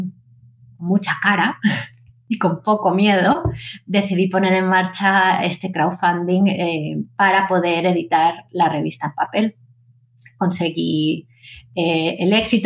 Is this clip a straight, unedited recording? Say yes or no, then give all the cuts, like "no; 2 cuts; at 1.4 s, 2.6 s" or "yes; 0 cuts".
yes; 0 cuts